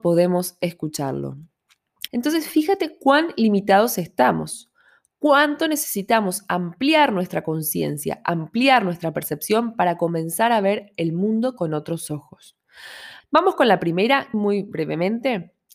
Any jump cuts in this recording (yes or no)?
yes